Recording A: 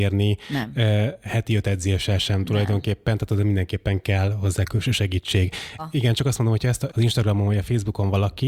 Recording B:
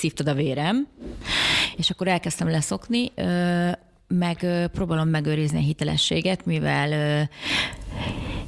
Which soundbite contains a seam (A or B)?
A